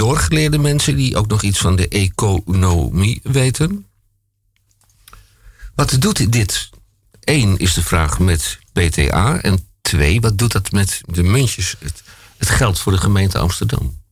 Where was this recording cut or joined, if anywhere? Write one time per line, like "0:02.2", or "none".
0:11.0